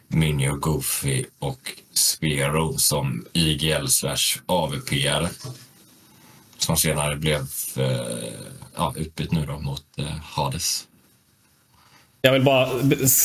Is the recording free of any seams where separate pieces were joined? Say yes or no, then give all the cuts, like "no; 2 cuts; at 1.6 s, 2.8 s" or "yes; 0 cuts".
no; 1 cut; at 12.2 s